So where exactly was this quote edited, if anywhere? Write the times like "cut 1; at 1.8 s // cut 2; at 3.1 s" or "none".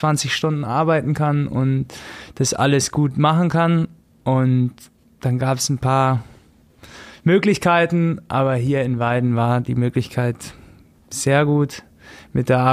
none